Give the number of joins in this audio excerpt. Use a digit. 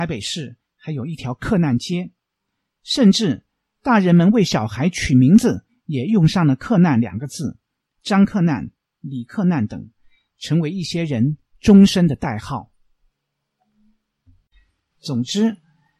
1